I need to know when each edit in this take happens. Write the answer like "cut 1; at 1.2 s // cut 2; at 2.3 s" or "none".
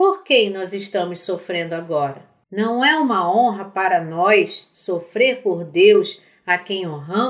cut 1; at 2.4 s